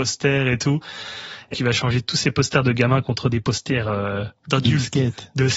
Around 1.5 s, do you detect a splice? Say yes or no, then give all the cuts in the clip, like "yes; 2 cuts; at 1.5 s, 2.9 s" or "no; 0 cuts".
yes; 1 cut; at 1.5 s